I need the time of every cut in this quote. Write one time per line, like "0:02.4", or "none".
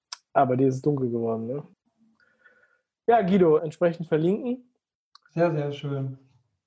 0:01.7
0:03.6